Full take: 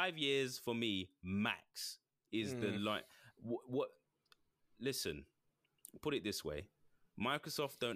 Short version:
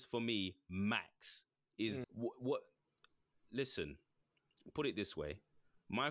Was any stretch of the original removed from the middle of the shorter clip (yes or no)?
yes